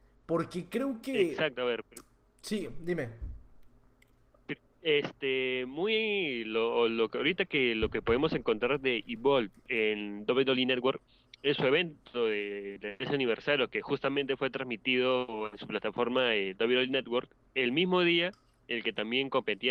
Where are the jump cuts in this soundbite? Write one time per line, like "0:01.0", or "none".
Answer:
0:17.5